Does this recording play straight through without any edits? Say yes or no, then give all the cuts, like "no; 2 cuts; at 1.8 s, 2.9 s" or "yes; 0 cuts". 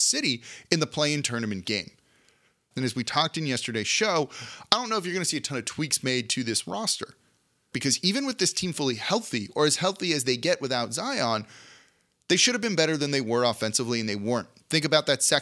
no; 2 cuts; at 2.7 s, 7.7 s